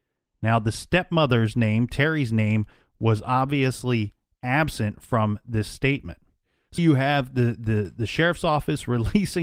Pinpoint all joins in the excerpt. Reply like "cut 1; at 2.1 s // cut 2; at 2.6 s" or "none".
cut 1; at 6.8 s